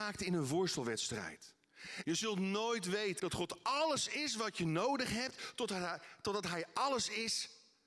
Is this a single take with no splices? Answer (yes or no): no